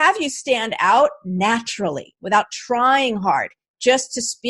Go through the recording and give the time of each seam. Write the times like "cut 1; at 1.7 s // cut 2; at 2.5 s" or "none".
none